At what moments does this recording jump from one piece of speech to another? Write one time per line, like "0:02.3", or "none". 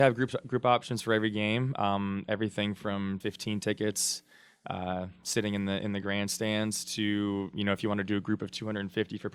0:03.2